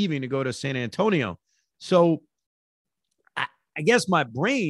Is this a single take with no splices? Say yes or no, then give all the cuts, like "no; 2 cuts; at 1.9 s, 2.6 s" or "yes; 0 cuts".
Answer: yes; 0 cuts